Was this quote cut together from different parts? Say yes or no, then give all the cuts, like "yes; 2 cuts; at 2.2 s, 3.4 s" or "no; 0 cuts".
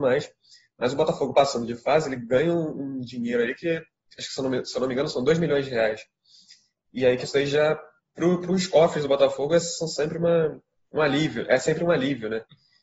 no; 0 cuts